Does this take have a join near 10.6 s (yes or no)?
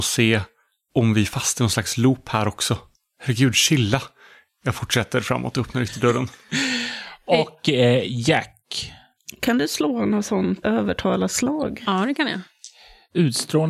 yes